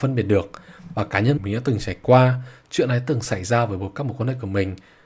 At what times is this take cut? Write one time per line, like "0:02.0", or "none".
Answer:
0:01.4